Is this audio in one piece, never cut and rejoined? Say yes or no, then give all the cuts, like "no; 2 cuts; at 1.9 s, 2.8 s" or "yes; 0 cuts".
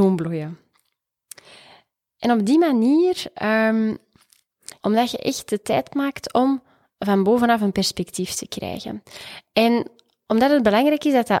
no; 1 cut; at 4.8 s